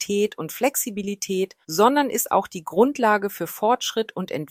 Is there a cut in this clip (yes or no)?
yes